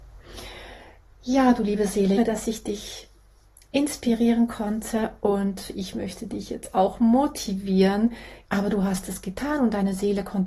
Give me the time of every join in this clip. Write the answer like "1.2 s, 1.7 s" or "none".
2.2 s, 8.4 s